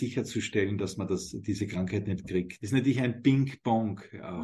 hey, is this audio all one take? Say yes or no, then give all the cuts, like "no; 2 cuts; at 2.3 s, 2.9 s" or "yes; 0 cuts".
no; 1 cut; at 2.6 s